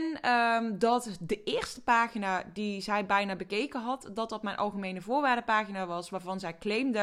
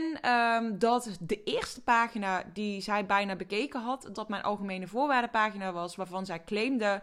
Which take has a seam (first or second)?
second